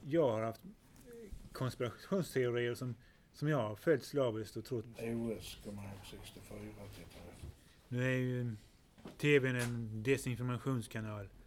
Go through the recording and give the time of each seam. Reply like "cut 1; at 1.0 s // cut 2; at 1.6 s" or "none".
cut 1; at 4.9 s